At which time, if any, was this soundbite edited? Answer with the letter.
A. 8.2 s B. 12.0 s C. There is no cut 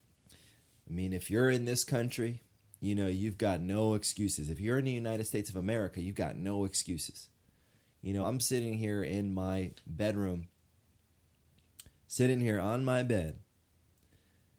A